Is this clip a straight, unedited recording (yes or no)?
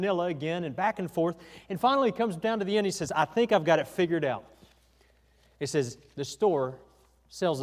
yes